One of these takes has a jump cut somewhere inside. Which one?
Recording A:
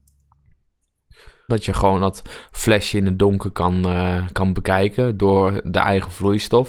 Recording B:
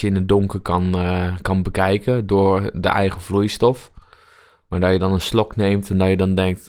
A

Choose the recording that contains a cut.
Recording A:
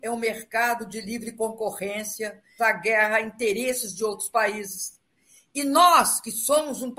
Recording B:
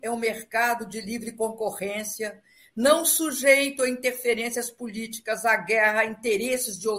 A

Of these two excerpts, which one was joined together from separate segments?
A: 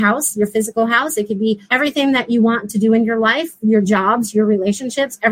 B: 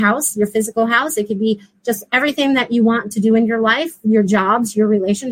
A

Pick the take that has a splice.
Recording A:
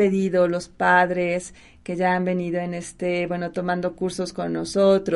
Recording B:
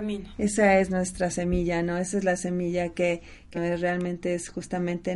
B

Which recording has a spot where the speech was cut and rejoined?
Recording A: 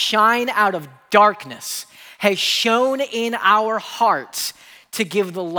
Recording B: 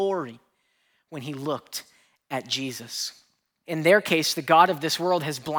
B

